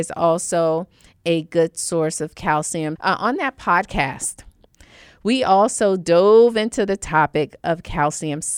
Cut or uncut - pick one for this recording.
cut